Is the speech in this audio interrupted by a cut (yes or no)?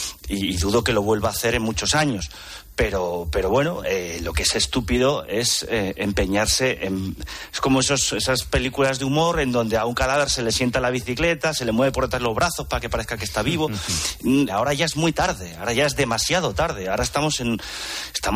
yes